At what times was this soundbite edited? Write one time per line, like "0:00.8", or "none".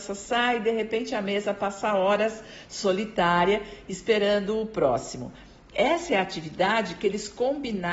none